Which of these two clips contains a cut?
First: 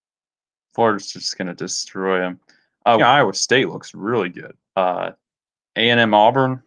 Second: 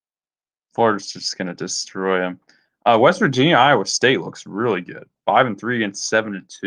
first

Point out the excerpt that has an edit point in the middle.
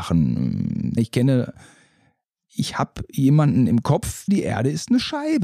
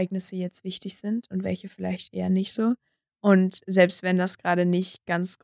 first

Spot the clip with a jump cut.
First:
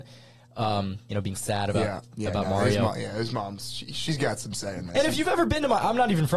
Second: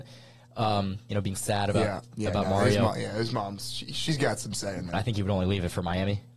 second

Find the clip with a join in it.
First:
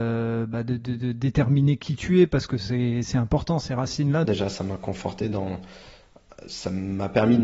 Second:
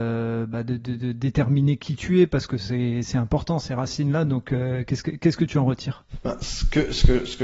first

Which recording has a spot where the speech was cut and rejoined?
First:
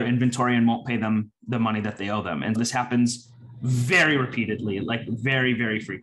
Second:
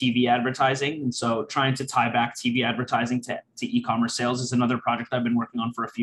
first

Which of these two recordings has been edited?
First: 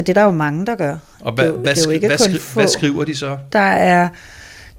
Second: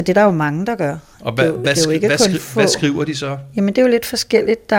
first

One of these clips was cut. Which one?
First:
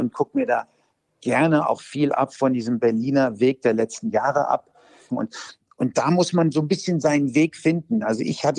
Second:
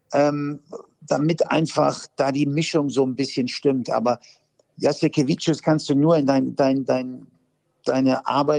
first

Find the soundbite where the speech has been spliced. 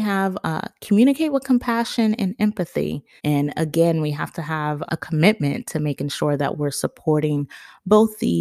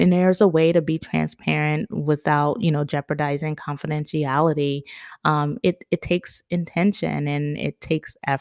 first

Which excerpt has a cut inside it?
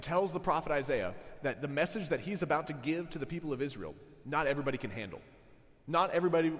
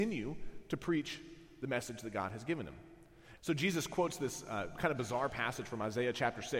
second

